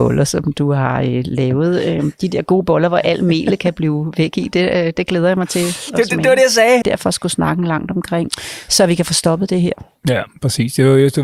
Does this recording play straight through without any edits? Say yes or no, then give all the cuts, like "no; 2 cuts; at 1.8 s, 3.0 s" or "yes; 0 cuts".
no; 1 cut; at 6.8 s